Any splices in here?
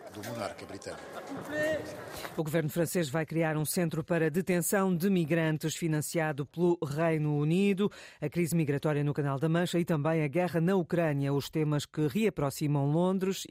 no; 0 cuts

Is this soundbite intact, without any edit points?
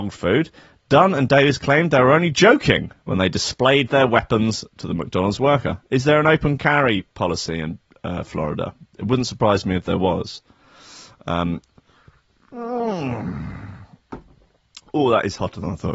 yes; 0 cuts

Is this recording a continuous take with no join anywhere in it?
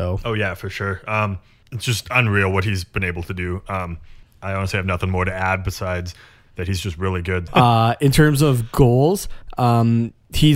no; 1 cut; at 7.5 s

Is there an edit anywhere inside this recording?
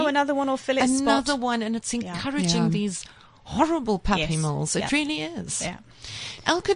no; 0 cuts

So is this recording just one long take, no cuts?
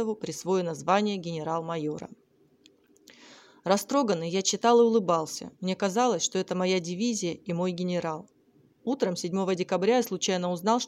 yes; 0 cuts

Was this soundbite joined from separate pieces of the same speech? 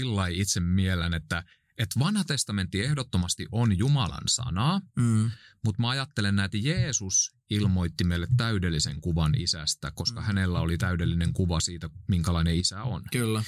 no; 0 cuts

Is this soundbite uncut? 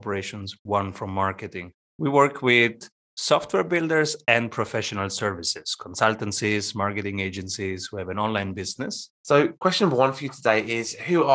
no; 2 cuts; at 1.9 s, 9.2 s

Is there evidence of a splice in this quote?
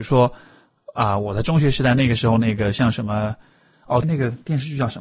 yes; 1 cut; at 4.0 s

